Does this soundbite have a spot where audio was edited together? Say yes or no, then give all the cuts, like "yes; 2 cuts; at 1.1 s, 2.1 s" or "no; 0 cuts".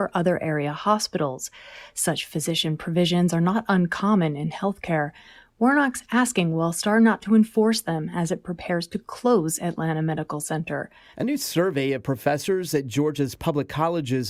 yes; 1 cut; at 11.1 s